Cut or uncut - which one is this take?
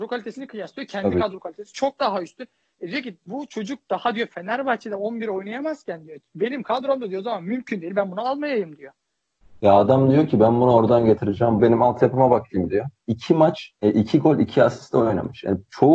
cut